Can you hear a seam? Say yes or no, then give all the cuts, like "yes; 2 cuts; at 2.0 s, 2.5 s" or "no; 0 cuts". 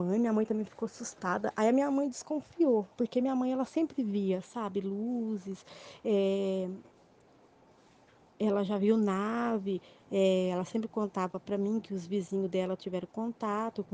no; 0 cuts